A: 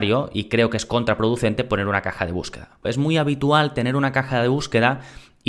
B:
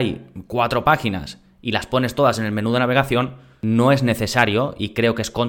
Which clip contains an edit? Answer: A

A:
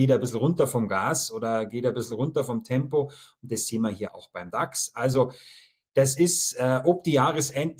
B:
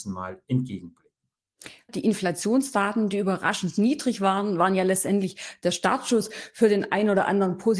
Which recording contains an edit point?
B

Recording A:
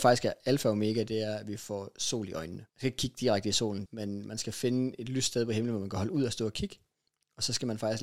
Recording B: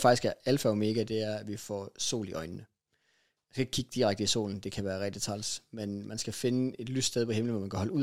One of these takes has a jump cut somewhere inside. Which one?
A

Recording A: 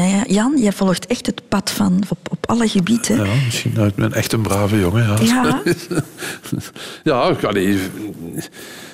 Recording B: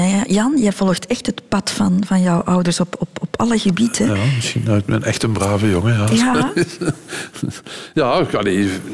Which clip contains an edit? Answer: A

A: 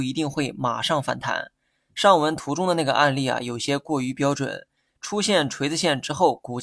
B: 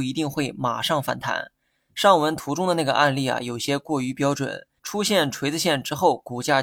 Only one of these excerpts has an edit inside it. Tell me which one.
B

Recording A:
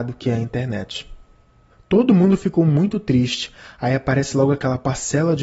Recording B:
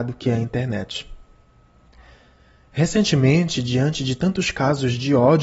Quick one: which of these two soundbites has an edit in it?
A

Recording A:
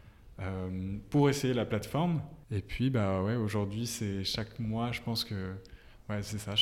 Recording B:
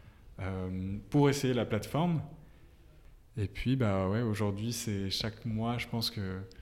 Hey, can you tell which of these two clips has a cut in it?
A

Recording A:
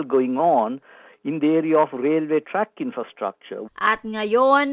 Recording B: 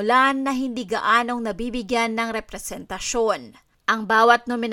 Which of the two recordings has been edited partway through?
A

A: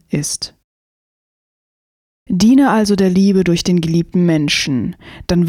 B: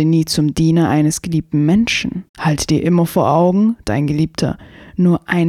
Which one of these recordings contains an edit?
B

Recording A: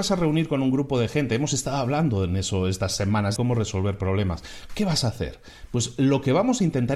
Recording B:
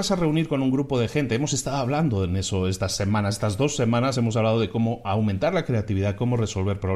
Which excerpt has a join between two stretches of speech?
A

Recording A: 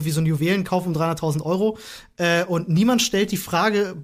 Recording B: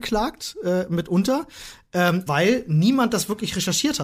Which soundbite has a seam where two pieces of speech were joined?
B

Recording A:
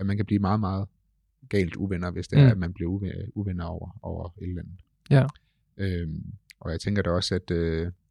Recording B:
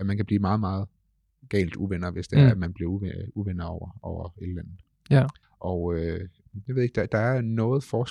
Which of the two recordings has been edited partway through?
B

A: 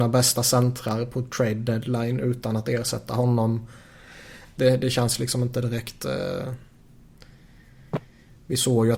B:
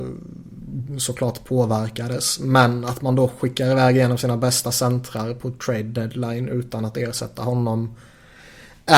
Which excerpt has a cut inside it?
A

